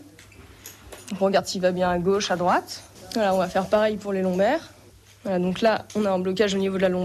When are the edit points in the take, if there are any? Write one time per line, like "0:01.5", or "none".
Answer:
none